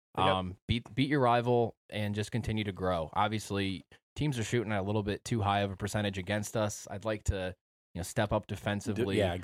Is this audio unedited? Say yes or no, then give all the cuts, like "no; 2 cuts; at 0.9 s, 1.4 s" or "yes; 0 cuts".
yes; 0 cuts